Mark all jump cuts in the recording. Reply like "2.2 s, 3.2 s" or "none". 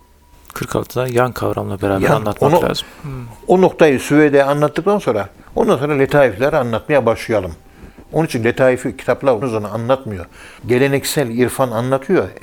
9.4 s, 10.6 s